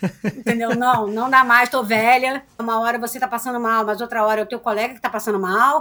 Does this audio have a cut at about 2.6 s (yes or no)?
yes